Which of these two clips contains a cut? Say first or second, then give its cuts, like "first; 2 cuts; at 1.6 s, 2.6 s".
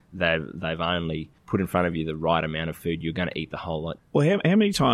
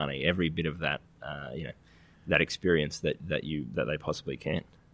first; 2 cuts; at 1.4 s, 4.0 s